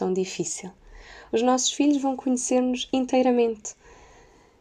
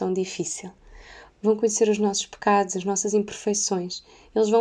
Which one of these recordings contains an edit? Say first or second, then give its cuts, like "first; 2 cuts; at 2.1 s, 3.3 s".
second; 1 cut; at 1.3 s